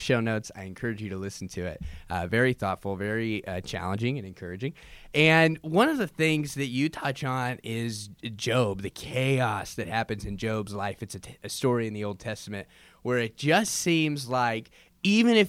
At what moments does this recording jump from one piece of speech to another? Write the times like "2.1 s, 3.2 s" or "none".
none